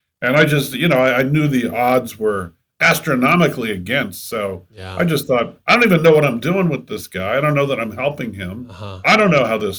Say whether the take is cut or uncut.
uncut